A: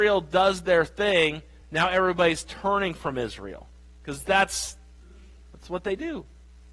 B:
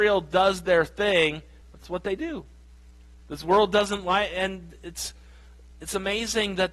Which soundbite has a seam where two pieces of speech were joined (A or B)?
B